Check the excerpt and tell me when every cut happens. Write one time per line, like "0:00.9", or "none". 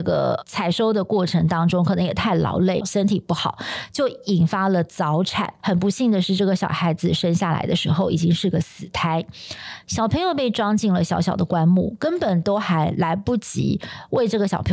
0:02.8
0:05.6